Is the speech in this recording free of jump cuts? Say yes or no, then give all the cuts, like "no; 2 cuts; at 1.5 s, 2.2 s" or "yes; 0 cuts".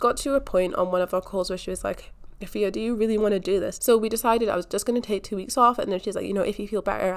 no; 1 cut; at 3.8 s